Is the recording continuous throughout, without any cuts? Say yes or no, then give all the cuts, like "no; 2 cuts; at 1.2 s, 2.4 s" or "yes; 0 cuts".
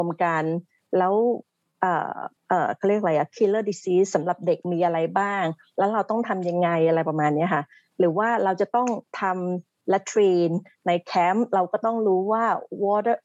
no; 1 cut; at 2.4 s